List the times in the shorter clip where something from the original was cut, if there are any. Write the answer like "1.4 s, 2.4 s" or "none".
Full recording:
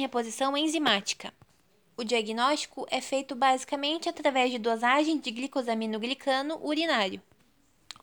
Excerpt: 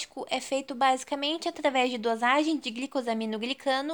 none